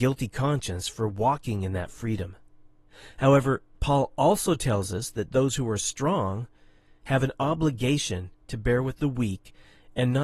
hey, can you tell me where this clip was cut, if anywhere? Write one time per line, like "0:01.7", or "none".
none